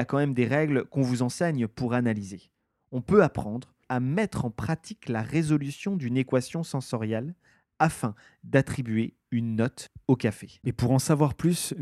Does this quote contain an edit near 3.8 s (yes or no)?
yes